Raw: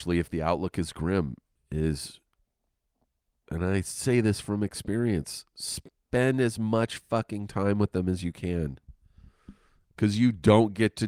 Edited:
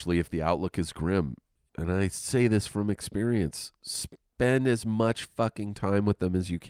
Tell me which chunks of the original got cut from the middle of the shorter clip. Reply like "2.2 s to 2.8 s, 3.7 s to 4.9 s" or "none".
1.7 s to 3.4 s